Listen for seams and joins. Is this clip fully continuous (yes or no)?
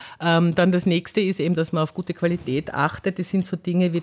yes